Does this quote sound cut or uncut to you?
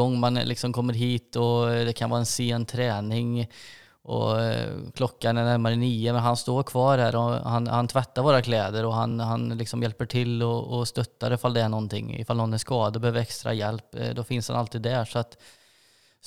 uncut